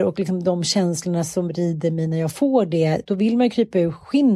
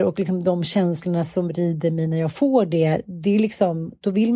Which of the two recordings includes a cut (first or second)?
first